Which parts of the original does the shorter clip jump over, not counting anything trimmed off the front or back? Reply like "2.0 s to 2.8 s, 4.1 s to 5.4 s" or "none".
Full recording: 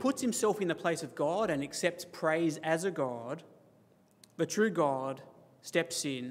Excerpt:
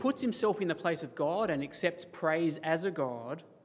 none